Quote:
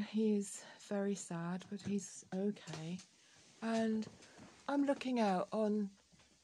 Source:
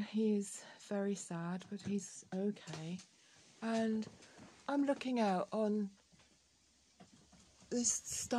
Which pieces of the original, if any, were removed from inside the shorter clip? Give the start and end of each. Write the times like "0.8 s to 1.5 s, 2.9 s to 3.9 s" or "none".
none

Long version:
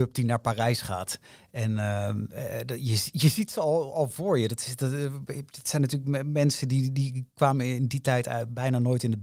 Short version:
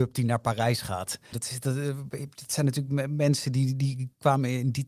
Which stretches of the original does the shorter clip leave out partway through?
1.3 s to 4.5 s

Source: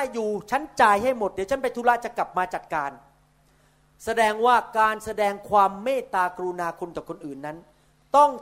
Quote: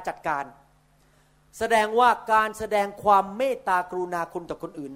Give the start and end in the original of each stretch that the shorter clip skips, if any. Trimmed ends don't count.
none

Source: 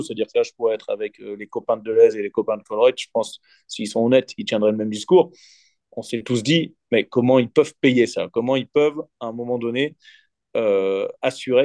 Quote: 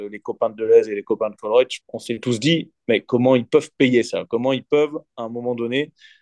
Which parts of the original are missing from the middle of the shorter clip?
3.1 s to 5.8 s

